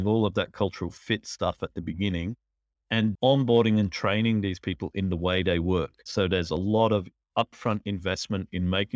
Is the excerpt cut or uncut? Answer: cut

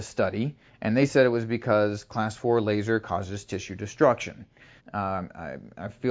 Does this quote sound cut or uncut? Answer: cut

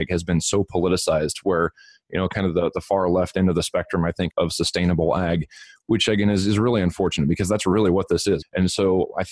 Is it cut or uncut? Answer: cut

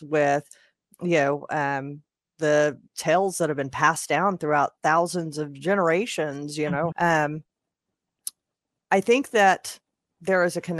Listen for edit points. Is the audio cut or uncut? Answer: cut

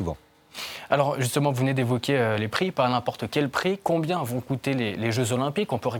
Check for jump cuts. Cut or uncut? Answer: uncut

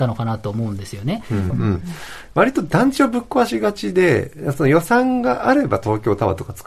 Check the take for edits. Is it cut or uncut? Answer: cut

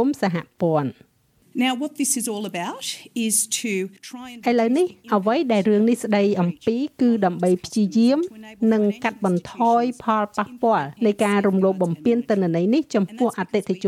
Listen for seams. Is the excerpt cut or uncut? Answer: cut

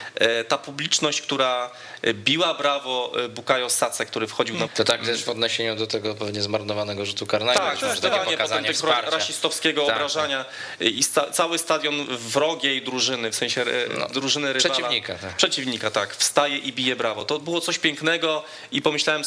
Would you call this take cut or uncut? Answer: cut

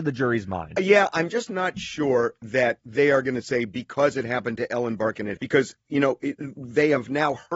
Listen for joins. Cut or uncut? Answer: cut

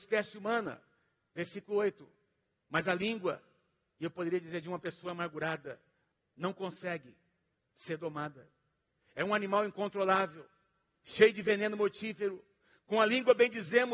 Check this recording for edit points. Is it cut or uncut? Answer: uncut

